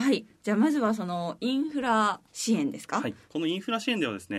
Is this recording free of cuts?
no; 1 cut; at 2.3 s

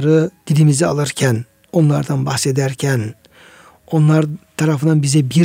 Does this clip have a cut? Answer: no; 0 cuts

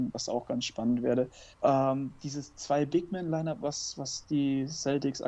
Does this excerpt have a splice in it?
yes; 1 cut; at 1.5 s

